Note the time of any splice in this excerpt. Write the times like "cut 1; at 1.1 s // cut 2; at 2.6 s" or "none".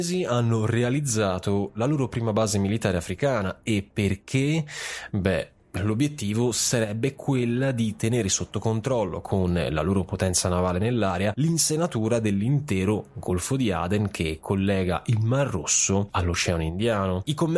none